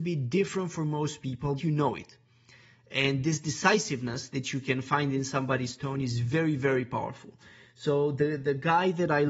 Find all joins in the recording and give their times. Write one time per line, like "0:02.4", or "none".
0:01.6